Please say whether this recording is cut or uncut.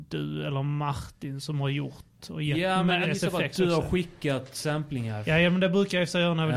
cut